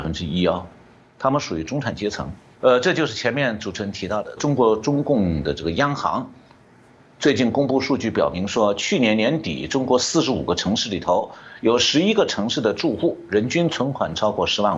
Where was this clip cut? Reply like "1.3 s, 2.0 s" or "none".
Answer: 2.5 s, 4.4 s